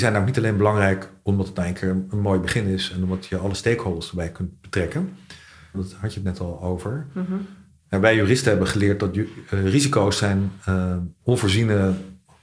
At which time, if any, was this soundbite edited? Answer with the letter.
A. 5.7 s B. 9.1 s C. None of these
A